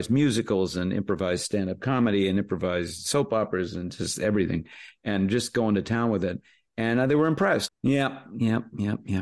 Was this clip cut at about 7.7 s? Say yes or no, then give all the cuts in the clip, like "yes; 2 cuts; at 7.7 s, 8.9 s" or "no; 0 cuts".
yes; 1 cut; at 7.7 s